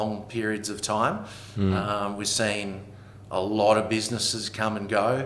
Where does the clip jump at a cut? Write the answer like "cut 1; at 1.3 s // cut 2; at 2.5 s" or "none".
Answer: none